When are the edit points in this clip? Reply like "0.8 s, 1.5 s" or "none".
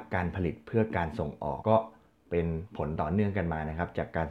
1.6 s